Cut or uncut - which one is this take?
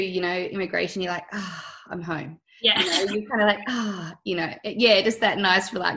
uncut